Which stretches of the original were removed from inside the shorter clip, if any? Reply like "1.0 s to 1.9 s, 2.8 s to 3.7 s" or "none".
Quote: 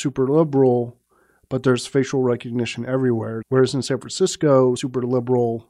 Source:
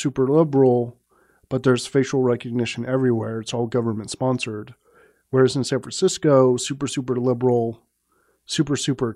3.4 s to 5.2 s, 6.6 s to 6.9 s